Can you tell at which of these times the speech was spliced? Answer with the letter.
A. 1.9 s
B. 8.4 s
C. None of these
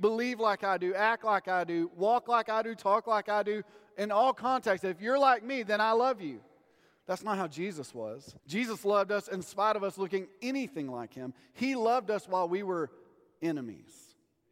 B